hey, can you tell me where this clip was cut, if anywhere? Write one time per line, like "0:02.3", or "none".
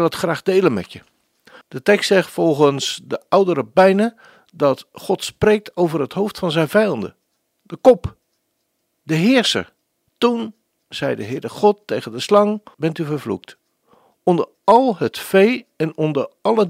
0:01.6
0:10.1
0:12.7